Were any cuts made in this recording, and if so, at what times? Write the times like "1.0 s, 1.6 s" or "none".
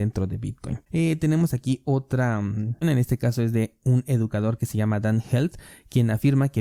2.8 s